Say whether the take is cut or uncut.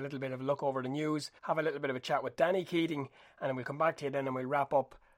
cut